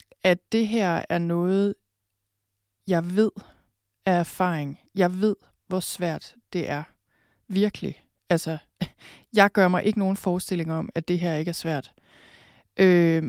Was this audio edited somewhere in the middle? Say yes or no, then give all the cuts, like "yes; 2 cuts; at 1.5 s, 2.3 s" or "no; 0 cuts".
no; 0 cuts